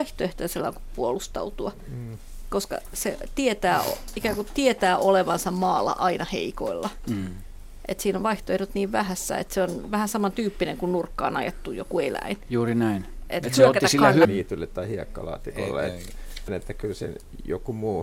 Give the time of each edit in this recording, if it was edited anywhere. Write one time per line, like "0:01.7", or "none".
0:14.2
0:16.5

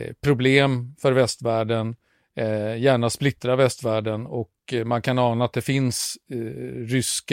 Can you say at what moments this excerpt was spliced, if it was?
none

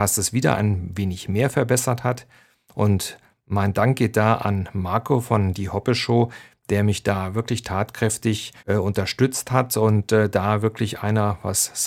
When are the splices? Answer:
0:08.6

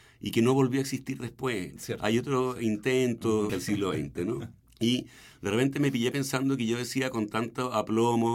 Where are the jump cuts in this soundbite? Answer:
0:03.5
0:04.6

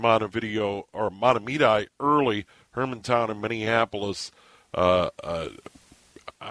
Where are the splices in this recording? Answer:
none

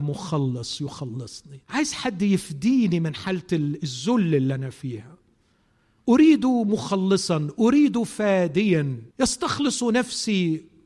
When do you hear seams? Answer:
0:01.6
0:09.1

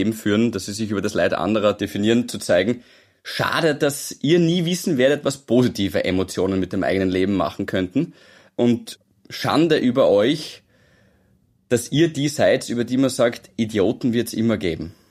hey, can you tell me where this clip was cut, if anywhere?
none

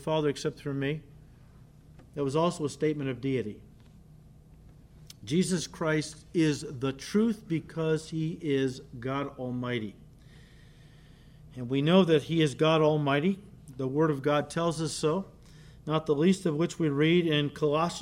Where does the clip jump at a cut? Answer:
none

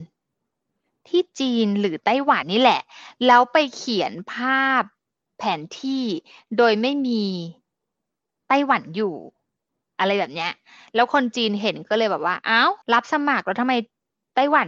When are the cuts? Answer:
0:02.4
0:12.8

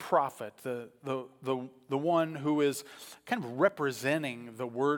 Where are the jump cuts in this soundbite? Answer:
none

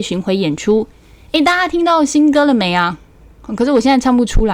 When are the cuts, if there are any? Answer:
none

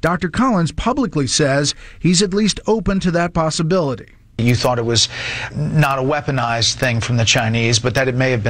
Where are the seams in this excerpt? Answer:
0:05.5

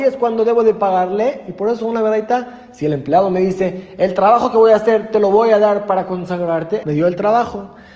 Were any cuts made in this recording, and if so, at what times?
0:06.8

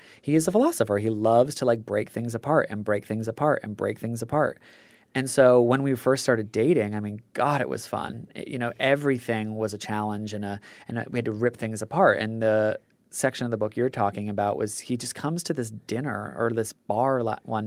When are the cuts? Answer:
none

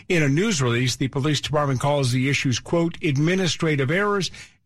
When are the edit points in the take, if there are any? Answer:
none

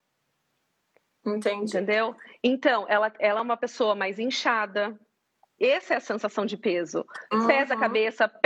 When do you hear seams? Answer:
0:05.6

